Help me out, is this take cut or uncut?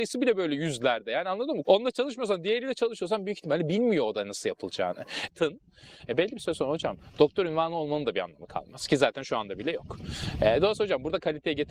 cut